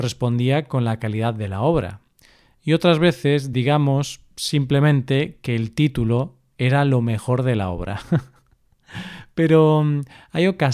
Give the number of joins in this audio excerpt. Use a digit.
0